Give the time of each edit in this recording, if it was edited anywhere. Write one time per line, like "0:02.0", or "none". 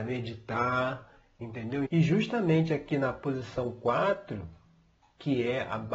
0:01.8